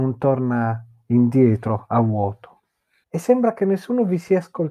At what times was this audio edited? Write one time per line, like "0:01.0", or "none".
0:03.0